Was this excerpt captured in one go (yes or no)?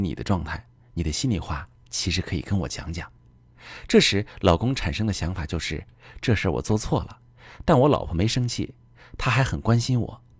yes